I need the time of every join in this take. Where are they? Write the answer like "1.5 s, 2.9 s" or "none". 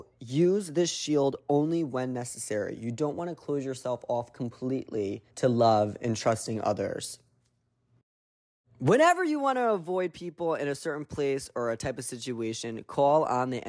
5.3 s